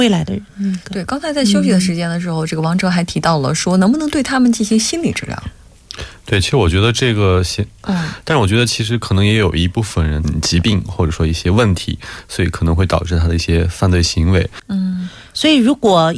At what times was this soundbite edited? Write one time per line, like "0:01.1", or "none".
0:07.8
0:10.2
0:14.6

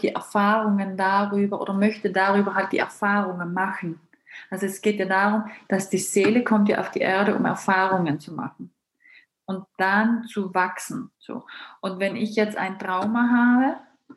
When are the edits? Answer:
0:11.2

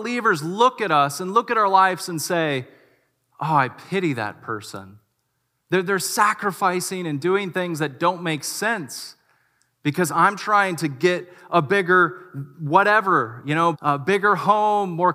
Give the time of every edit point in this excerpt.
0:05.6
0:13.7

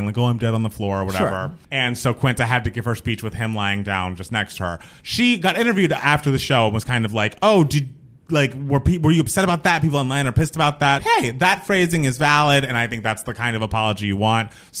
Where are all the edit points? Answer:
0:01.6
0:11.0

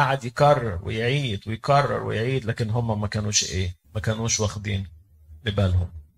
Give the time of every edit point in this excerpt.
0:03.8

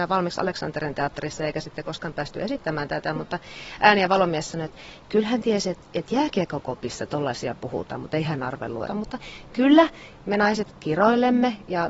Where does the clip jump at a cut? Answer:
0:08.9

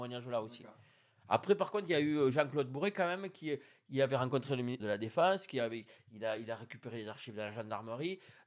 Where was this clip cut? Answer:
0:04.8

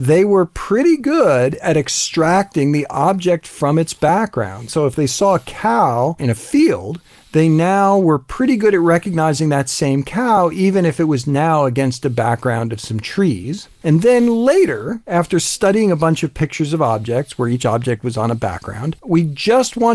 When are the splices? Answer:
0:13.8
0:19.0

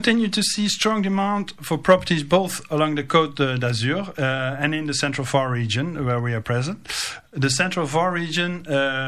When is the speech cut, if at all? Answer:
none

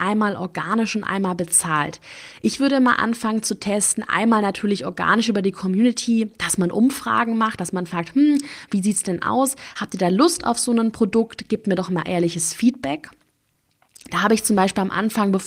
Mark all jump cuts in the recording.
none

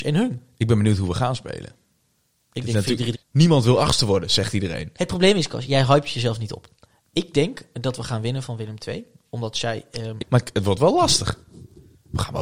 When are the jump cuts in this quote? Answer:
0:03.1
0:10.2

